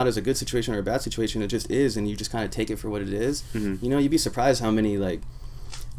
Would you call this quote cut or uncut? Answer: uncut